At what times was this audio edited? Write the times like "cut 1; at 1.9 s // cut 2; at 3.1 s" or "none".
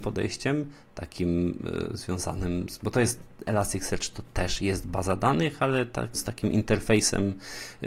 cut 1; at 6.1 s